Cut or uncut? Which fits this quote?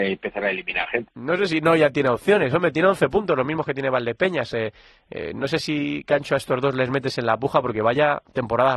cut